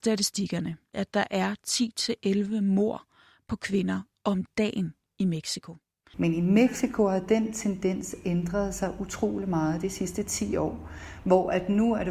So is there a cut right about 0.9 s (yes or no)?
yes